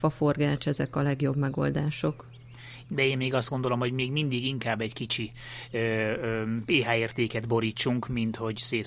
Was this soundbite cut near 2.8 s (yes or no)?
yes